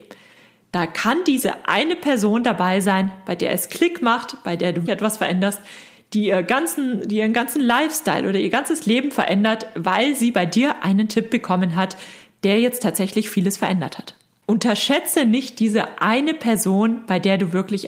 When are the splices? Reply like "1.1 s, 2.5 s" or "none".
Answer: 4.9 s